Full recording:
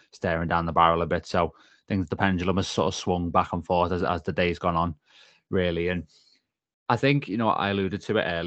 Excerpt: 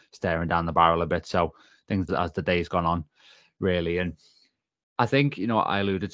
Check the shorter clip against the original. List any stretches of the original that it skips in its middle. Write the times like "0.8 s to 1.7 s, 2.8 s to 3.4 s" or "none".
2.1 s to 4.0 s

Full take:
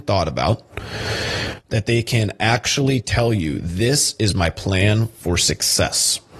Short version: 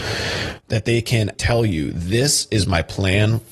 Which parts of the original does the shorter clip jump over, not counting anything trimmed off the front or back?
2.4 s to 3.0 s

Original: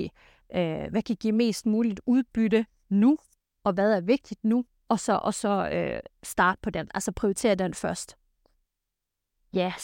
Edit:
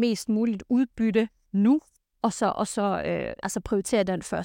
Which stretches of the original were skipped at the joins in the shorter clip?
3.5 s to 4.8 s, 6.1 s to 6.9 s

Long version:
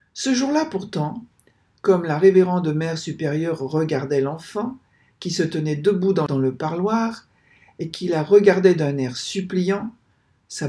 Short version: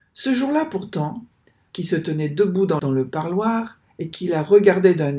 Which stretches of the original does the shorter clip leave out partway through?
1.7 s to 5.2 s, 7.4 s to 7.7 s

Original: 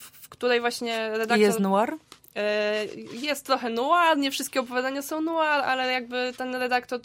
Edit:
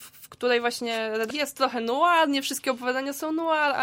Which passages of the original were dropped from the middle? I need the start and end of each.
1.3 s to 3.2 s

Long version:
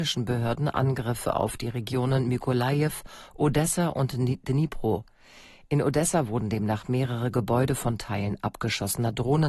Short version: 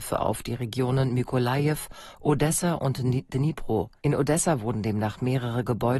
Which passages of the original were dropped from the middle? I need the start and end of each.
5.1 s to 5.7 s

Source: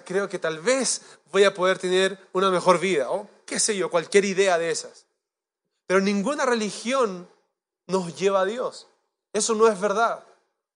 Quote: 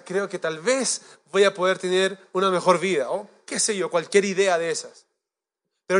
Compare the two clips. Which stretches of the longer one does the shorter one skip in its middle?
none

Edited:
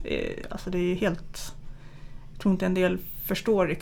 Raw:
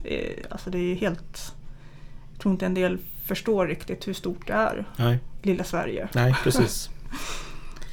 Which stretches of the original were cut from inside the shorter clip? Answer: none

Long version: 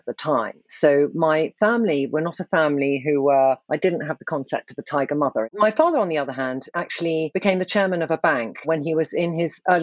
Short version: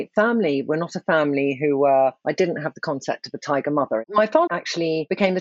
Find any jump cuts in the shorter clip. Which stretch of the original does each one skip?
5.9 s to 6.7 s

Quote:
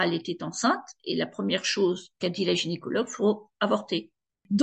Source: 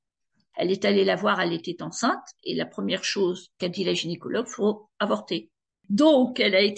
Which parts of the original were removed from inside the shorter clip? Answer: none

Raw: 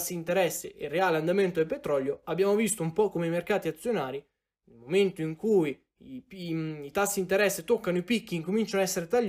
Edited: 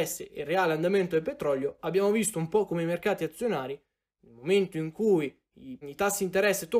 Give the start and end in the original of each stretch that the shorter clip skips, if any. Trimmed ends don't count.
6.3 s to 6.8 s

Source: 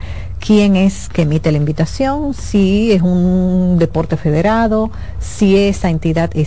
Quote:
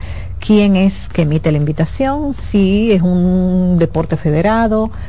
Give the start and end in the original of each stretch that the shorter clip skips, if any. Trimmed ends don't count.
none

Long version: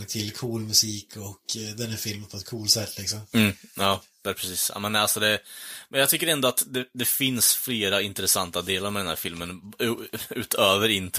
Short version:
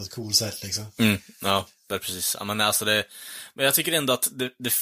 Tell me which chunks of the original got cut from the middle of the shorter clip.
none

